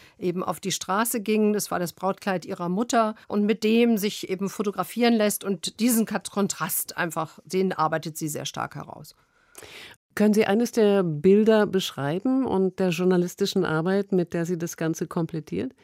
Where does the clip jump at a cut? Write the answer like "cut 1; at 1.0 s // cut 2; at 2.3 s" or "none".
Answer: cut 1; at 3.2 s // cut 2; at 9.9 s